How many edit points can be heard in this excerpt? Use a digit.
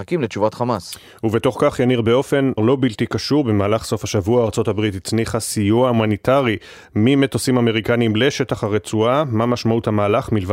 1